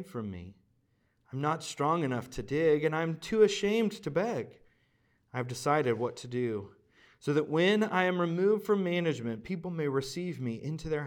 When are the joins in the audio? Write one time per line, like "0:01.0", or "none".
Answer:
none